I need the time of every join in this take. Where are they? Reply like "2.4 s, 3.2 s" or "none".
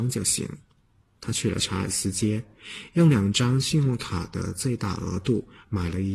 none